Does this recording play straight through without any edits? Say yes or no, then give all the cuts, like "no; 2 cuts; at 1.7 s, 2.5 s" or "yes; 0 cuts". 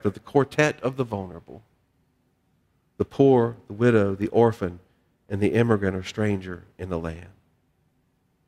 yes; 0 cuts